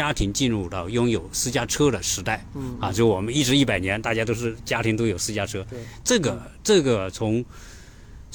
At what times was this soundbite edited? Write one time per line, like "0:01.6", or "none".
0:06.0